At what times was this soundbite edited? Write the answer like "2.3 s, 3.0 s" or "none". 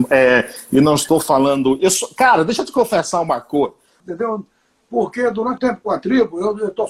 4.0 s, 5.6 s